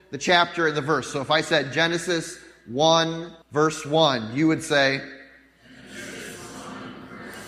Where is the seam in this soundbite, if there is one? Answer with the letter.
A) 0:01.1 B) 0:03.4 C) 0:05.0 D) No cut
B